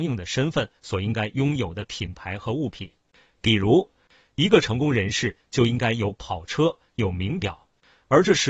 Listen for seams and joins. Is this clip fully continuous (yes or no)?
yes